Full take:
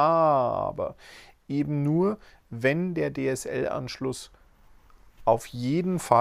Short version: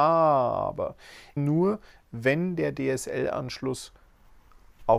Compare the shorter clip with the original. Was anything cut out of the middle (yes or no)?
yes